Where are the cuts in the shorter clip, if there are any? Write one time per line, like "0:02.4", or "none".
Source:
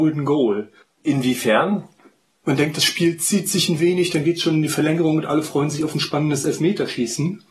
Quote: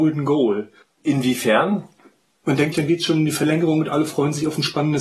0:02.7